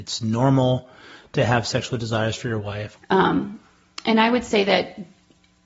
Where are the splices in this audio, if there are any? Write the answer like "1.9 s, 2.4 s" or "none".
2.9 s